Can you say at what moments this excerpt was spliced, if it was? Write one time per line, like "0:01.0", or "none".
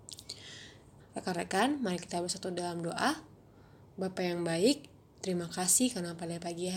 0:01.0